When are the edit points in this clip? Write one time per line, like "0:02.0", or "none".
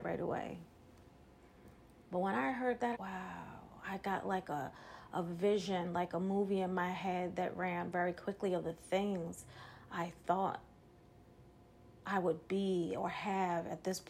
0:02.9